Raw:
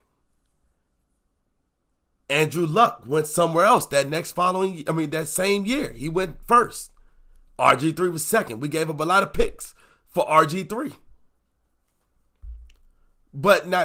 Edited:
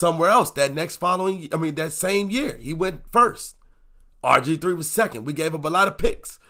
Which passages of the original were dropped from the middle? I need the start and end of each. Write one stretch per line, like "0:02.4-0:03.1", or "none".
none